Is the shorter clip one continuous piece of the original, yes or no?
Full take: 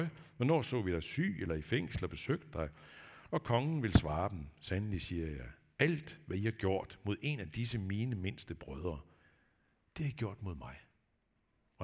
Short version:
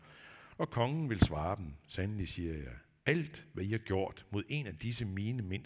yes